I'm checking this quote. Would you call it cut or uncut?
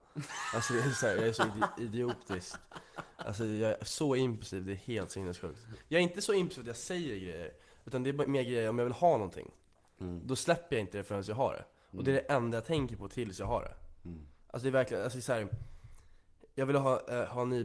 uncut